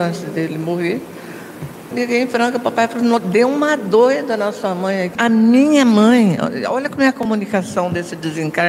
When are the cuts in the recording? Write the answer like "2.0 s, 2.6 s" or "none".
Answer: 1.9 s, 5.2 s